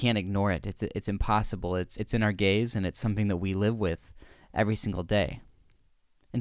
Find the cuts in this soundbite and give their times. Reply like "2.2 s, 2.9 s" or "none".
2.0 s

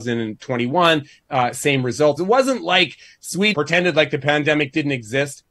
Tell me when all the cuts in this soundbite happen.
2.2 s, 3.5 s

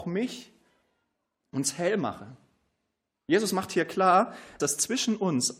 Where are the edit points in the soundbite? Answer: 1.4 s, 4.6 s

